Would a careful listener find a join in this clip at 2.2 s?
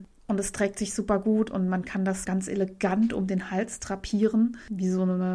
yes; 1 cut; at 2.2 s

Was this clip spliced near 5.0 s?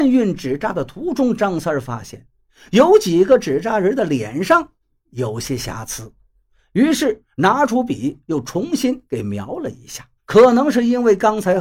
no; 1 cut; at 10.2 s

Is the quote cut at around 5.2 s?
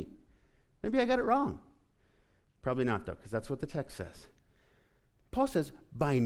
yes; 1 cut; at 5.2 s

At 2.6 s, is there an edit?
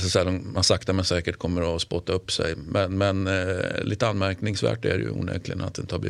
no; 0 cuts

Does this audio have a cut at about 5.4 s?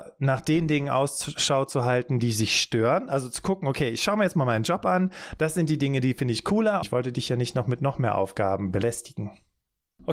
yes; 2 cuts; at 5.4 s, 6.8 s

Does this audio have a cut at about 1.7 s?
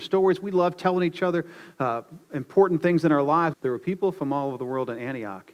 no; 1 cut; at 3.5 s

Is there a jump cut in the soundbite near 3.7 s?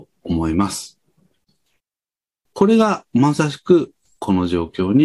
no; 1 cut; at 2.5 s

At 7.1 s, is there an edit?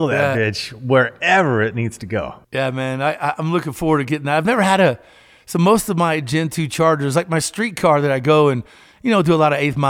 no; 1 cut; at 2.4 s

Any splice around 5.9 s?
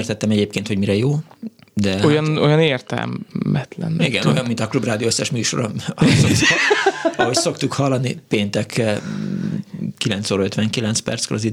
no; 0 cuts

